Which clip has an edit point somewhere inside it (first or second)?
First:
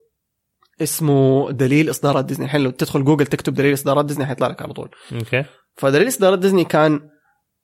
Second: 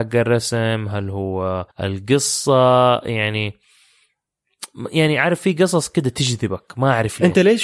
second